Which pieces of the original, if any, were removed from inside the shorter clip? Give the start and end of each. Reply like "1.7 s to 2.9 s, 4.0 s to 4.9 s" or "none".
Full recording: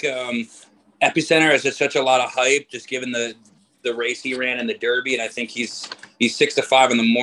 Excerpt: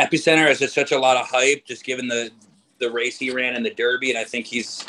none